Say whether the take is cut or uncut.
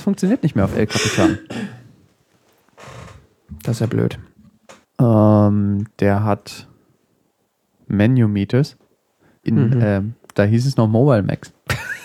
cut